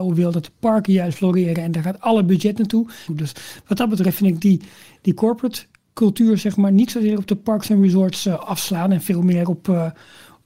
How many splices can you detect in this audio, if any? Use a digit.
1